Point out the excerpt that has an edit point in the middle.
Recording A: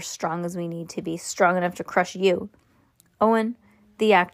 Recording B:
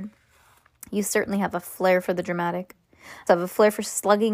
B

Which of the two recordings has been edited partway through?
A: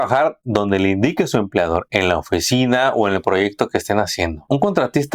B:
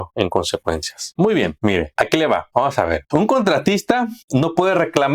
B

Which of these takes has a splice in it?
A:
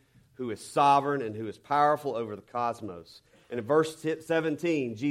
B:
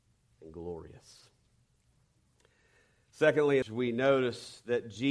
B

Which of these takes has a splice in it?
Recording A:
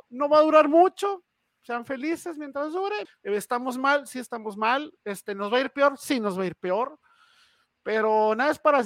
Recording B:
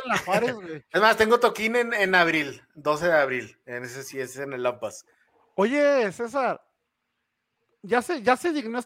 A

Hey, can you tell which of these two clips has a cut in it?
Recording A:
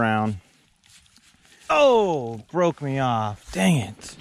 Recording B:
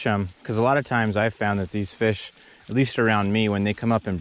A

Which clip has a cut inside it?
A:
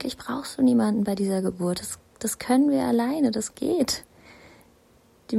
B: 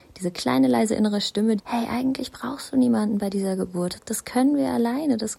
B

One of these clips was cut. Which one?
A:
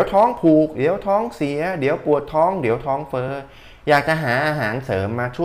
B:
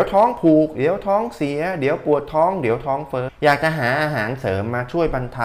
B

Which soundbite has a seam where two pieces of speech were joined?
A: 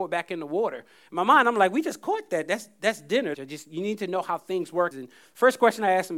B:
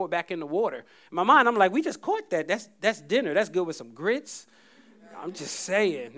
A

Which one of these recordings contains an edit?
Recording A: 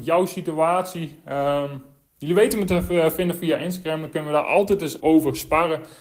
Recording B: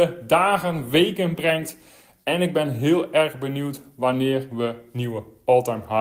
A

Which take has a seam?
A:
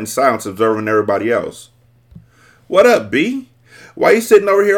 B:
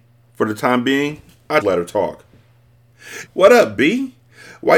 B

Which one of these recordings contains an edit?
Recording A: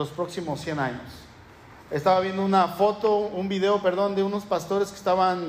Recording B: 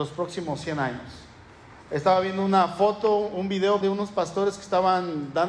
B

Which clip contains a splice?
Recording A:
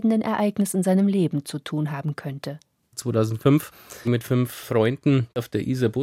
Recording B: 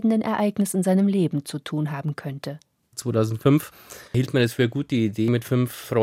A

